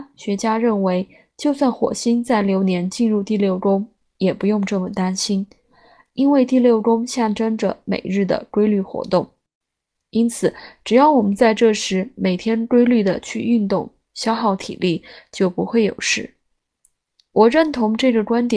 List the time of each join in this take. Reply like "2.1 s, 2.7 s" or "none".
none